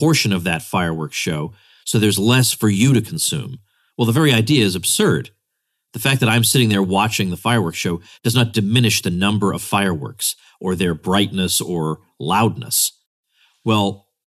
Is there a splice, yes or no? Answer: no